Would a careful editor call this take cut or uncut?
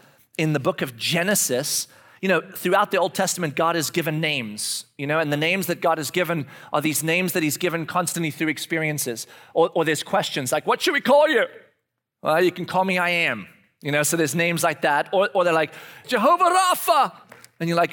cut